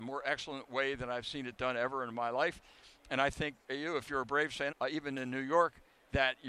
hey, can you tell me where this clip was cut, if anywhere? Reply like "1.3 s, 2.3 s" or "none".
3.6 s, 4.7 s

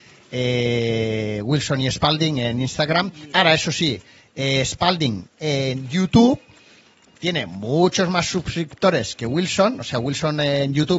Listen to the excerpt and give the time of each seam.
none

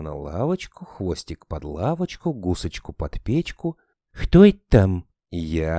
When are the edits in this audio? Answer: 3.9 s

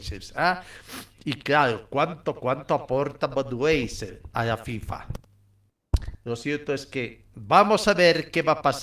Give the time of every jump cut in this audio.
6.1 s

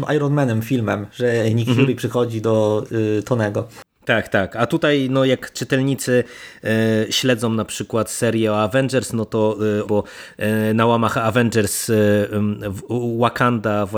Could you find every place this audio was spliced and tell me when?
9.8 s

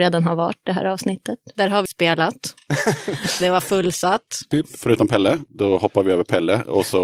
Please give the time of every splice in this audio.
1.9 s, 4.5 s

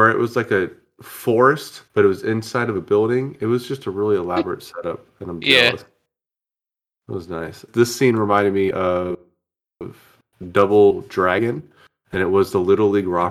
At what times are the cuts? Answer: 7.7 s

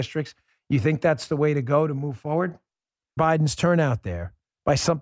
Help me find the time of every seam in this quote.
3.2 s

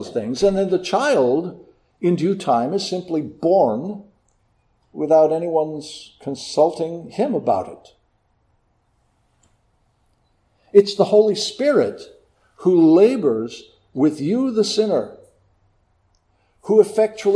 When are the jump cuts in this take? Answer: none

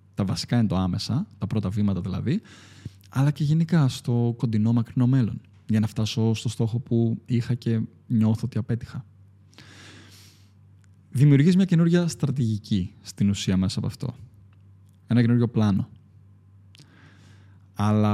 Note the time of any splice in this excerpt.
none

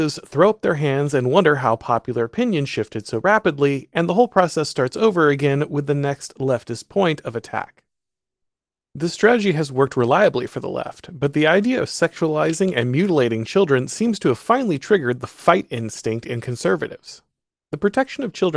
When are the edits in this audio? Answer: none

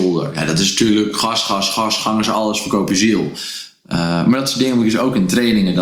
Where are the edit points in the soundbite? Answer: none

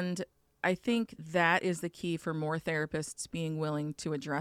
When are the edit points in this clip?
1.2 s

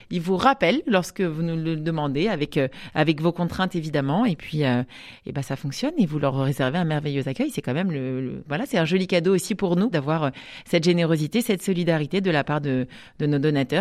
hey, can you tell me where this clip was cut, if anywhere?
9.9 s

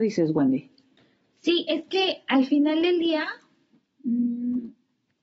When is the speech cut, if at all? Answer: none

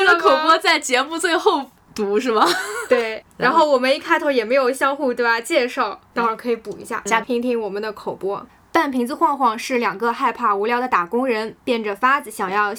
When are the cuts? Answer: 7.2 s

